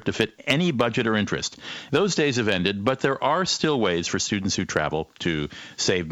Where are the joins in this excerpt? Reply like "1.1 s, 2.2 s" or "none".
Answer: 1.9 s

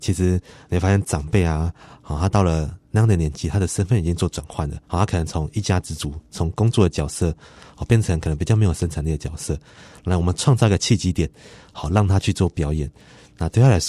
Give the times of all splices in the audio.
4.8 s

